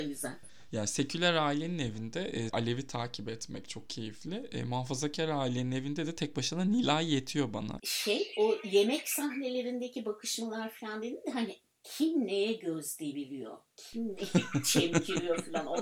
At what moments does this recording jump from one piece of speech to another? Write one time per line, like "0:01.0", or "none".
0:02.5
0:07.8